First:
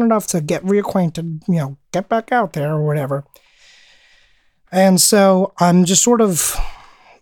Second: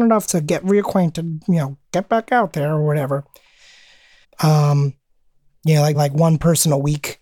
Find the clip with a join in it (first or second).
second